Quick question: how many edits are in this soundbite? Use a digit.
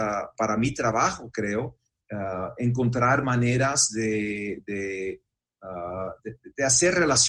0